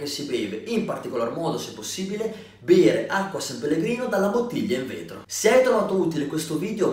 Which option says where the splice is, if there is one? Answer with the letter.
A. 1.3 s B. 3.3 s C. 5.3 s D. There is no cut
D